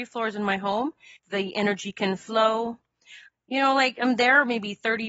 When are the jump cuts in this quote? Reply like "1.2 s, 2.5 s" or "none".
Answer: 1.2 s, 3.3 s

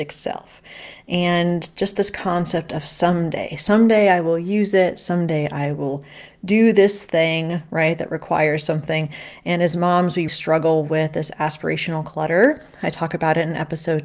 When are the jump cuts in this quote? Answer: 10.3 s

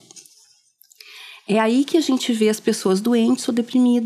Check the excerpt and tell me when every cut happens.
none

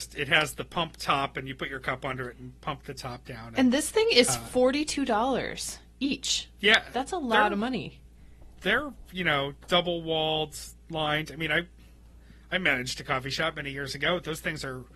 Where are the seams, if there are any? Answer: none

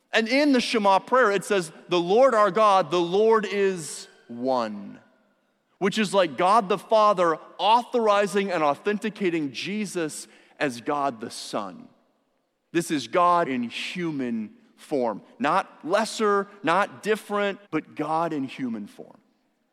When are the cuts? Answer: 13.4 s, 17.7 s

